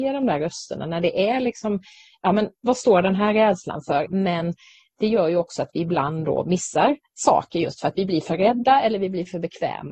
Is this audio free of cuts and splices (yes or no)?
no